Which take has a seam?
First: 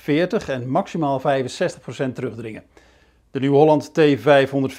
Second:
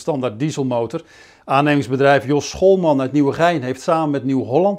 second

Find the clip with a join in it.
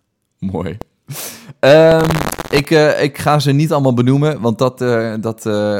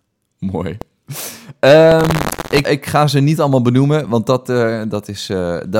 second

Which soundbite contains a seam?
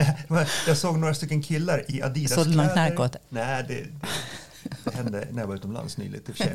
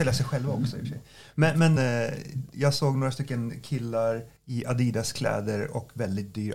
second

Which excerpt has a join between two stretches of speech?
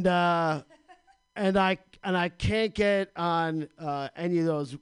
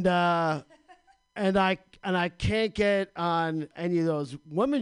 second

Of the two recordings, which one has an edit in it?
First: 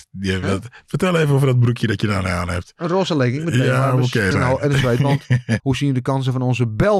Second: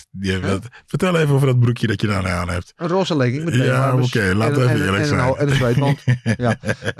first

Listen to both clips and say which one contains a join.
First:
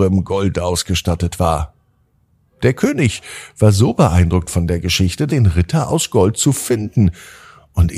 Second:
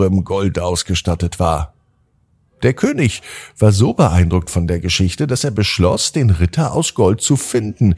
first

